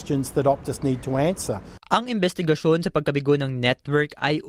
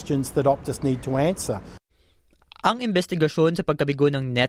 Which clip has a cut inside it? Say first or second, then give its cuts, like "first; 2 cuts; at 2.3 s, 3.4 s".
first; 1 cut; at 1.8 s